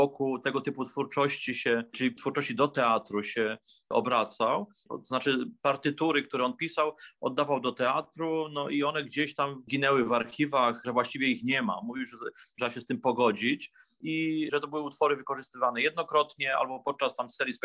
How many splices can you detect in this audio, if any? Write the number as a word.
one